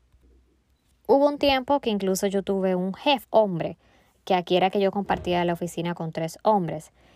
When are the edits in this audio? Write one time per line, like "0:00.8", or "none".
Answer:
0:03.2